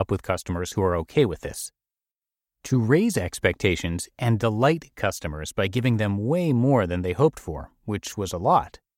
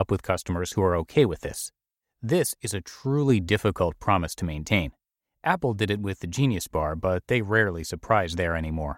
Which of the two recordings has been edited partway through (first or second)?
second